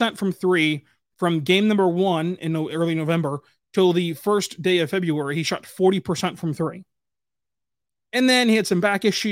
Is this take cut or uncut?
uncut